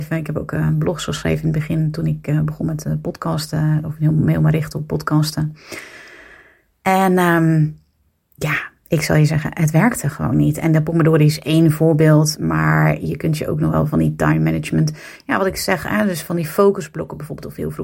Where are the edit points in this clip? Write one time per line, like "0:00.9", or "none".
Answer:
none